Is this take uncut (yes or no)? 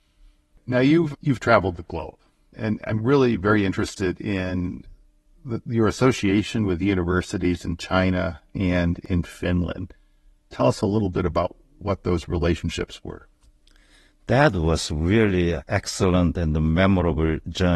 yes